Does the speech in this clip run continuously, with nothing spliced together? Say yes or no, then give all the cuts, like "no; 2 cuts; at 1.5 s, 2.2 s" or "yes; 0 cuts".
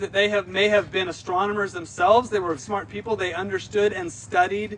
no; 1 cut; at 2.6 s